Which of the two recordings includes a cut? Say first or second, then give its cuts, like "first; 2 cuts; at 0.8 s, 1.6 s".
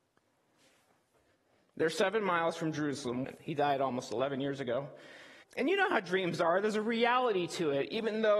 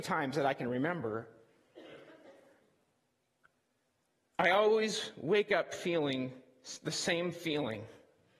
first; 2 cuts; at 3.2 s, 5.4 s